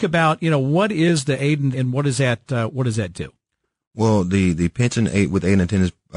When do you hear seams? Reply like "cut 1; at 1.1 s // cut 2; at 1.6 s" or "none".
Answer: cut 1; at 1.7 s

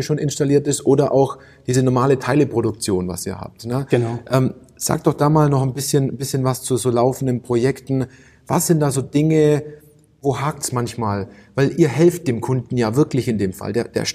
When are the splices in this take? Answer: none

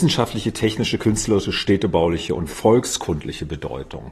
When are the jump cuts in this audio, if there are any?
none

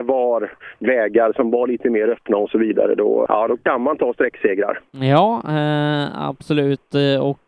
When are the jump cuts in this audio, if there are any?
cut 1; at 3.3 s // cut 2; at 4.9 s

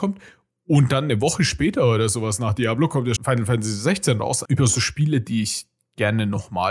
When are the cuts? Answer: cut 1; at 3.2 s // cut 2; at 4.5 s

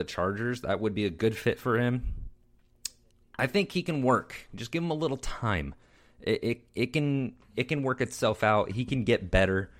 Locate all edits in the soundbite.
none

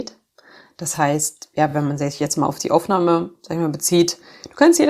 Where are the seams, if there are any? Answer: none

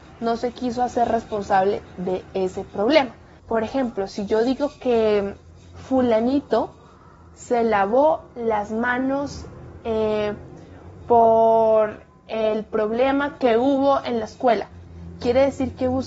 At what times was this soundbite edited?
cut 1; at 3.4 s

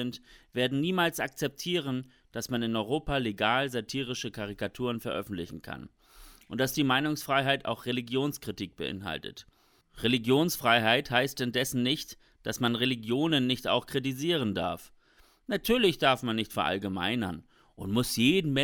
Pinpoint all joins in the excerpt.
none

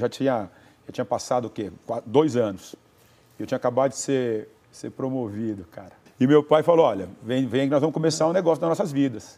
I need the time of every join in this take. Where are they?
cut 1; at 6.1 s

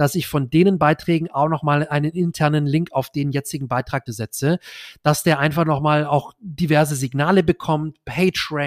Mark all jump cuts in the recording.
cut 1; at 4.1 s

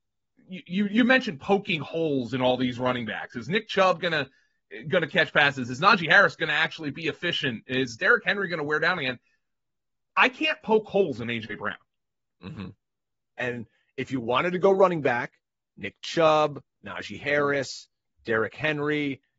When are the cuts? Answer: cut 1; at 13.4 s

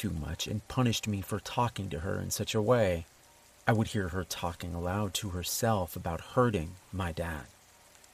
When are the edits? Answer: none

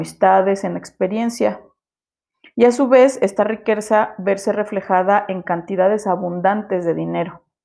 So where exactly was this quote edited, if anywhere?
none

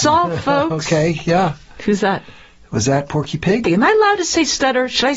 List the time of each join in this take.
cut 1; at 3.6 s

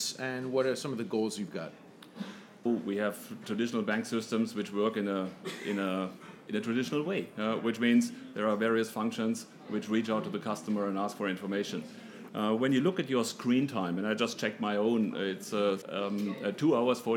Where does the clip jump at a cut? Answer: cut 1; at 2.7 s // cut 2; at 12.3 s // cut 3; at 15.8 s

